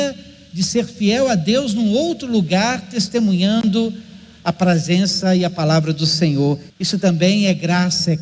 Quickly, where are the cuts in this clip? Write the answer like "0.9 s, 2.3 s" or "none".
6.7 s